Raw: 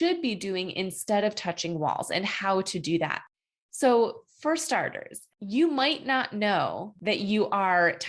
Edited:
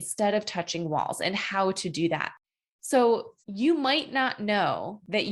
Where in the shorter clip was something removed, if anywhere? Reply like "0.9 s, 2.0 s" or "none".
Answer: 3.4 s